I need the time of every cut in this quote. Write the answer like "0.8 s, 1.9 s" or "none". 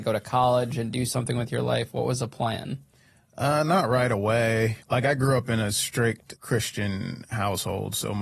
4.8 s, 6.4 s